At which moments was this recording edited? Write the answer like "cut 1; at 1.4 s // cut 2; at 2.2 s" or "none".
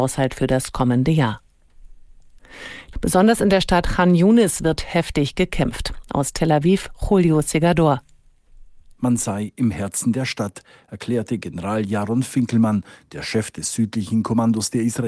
cut 1; at 2.9 s